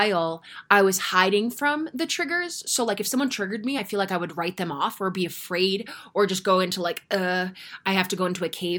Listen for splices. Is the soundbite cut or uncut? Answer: uncut